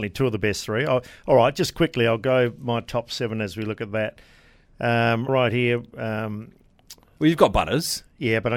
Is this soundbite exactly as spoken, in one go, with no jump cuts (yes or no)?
no